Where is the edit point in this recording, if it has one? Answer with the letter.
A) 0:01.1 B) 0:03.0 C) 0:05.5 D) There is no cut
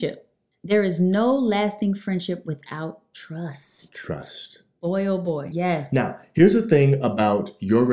C